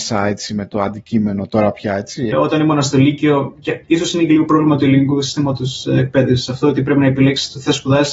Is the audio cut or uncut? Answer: cut